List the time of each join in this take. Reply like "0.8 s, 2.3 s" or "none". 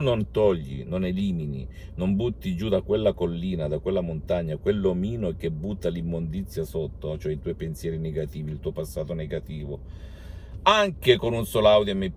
none